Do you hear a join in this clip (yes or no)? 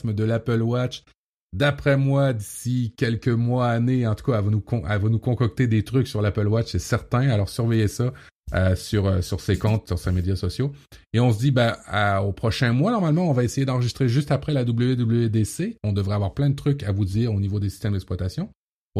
no